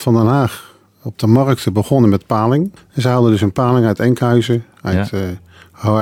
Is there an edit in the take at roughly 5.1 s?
no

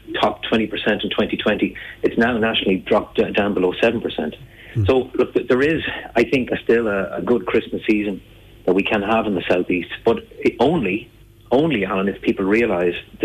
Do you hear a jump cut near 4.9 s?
no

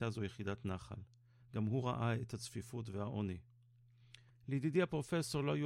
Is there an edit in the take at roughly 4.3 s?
yes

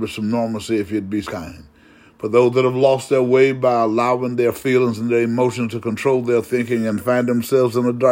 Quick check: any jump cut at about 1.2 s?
yes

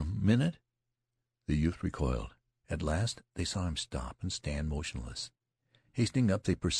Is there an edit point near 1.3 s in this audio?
no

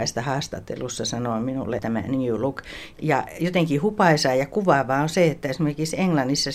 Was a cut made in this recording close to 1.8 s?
yes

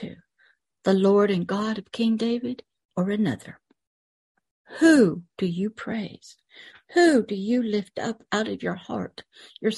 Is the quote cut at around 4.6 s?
yes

